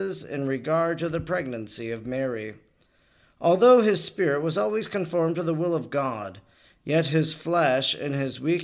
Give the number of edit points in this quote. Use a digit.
0